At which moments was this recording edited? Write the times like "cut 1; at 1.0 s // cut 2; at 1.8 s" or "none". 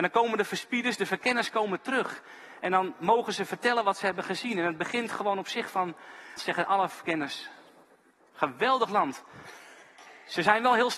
cut 1; at 6.4 s